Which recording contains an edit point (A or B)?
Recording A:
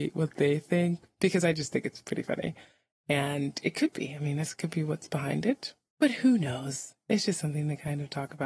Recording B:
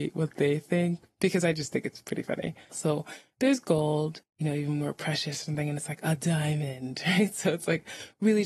B